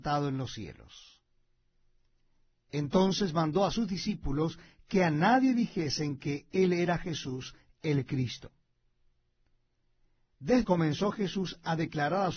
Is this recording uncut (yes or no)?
no